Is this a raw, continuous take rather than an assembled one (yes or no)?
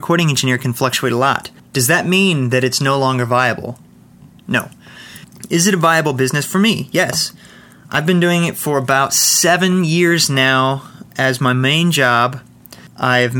yes